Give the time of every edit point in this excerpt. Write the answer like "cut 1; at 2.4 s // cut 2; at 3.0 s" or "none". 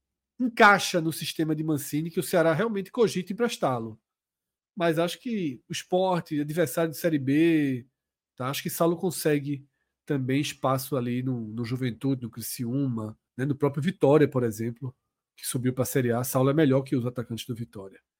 cut 1; at 13.3 s